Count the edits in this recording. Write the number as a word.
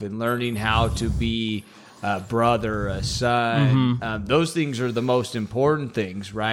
zero